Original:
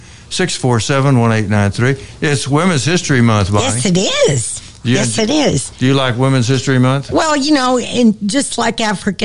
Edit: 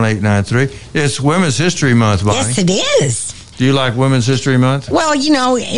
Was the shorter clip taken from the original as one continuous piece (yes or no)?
no